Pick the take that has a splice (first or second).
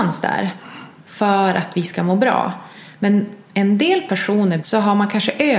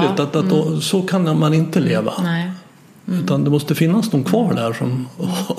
first